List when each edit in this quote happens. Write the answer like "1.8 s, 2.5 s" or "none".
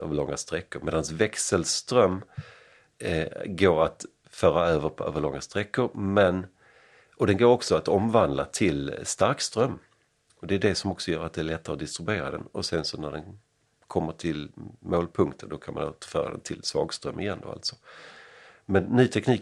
none